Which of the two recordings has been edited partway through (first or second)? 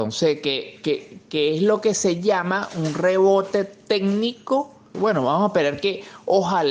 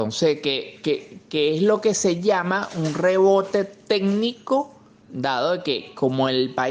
first